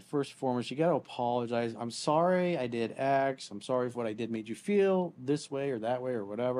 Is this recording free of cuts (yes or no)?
yes